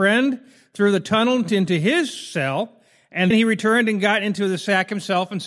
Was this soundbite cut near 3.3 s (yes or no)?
yes